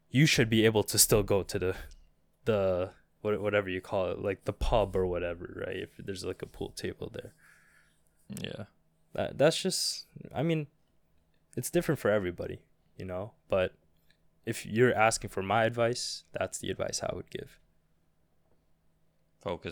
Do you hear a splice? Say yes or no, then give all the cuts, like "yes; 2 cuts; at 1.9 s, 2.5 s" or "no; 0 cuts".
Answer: no; 0 cuts